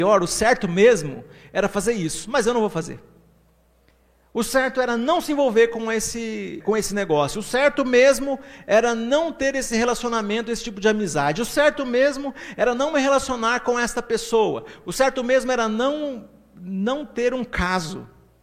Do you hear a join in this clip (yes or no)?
yes